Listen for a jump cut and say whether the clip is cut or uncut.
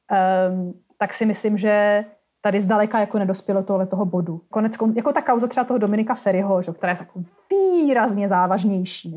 cut